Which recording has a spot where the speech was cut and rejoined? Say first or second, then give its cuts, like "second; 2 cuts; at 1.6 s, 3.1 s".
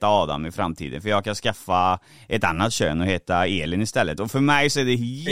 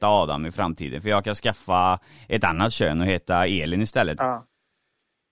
second; 1 cut; at 4.2 s